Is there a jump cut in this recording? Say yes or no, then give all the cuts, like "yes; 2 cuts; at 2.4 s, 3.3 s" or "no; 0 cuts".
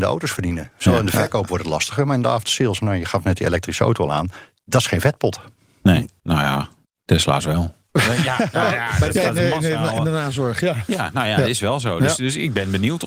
no; 0 cuts